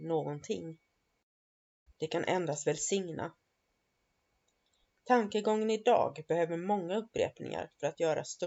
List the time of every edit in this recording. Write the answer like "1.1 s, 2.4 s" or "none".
1.9 s

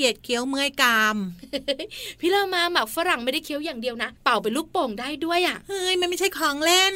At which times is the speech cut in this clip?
4.2 s

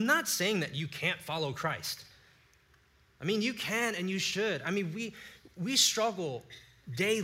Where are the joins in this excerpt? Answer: none

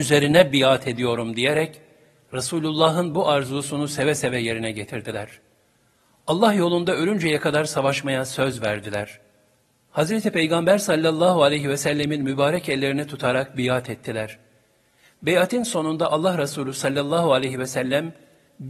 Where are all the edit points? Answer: none

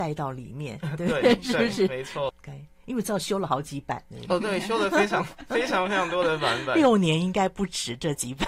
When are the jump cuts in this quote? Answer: 2.3 s

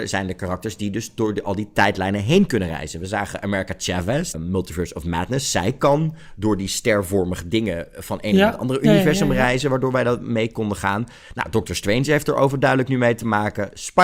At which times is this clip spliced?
4.3 s

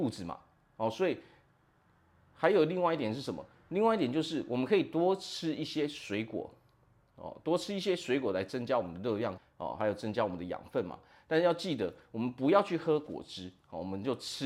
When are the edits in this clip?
9.4 s

